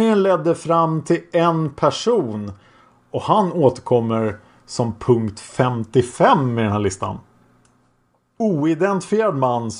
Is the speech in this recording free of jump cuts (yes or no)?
no